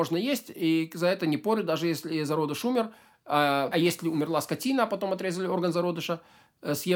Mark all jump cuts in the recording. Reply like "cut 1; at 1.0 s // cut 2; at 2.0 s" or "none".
cut 1; at 3.7 s